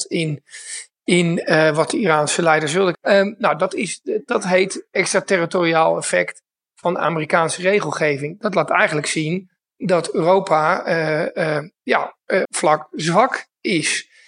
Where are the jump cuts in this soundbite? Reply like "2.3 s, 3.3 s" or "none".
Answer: 2.9 s, 12.4 s